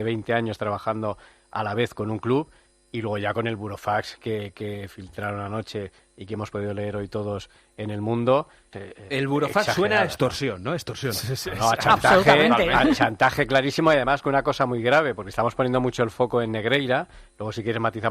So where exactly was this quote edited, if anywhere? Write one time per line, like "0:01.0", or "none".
0:08.7